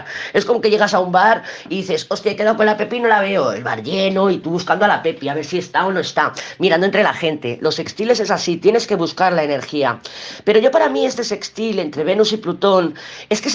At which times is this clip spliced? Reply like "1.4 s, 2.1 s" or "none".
none